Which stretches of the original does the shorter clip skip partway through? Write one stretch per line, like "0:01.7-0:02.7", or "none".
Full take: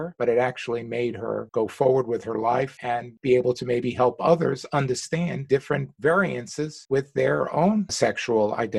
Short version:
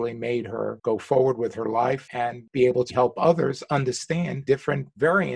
0:03.6-0:03.9

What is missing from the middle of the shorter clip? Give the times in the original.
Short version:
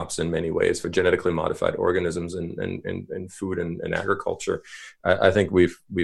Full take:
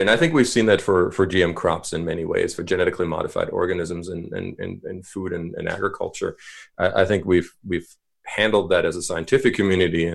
none

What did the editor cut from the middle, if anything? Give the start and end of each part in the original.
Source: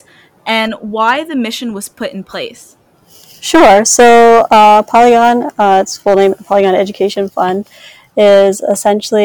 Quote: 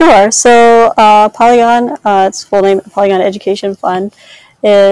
none

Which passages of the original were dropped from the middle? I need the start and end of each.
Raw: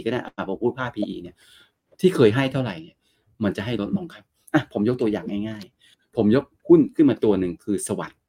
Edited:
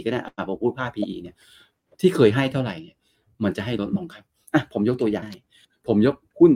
0:05.2-0:05.5

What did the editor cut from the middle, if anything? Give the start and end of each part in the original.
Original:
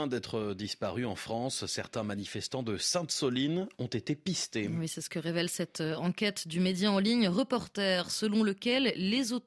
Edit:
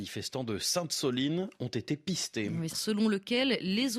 0:04.9-0:08.0

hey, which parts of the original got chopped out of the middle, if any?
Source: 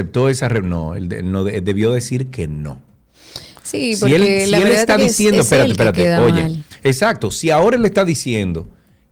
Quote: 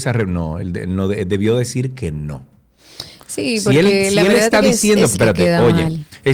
0:05.5-0:05.7

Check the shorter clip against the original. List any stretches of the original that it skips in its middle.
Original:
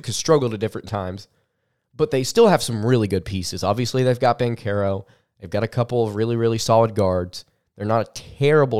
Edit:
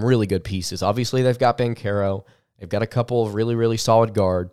none

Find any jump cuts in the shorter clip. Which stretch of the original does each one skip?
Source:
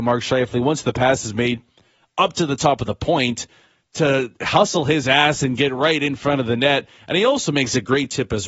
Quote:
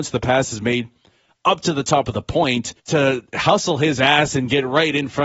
0:03.5-0:03.9

